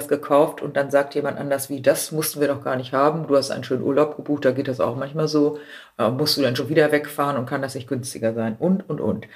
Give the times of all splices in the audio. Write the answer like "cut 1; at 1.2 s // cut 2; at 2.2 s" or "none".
none